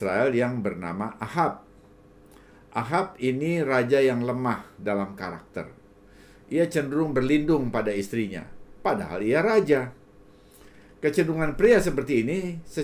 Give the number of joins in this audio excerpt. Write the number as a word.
zero